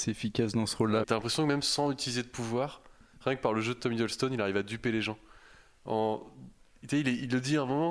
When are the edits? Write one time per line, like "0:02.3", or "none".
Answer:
0:01.0